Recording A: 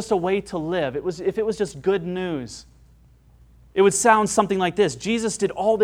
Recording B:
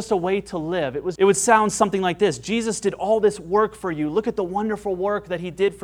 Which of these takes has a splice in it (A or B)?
B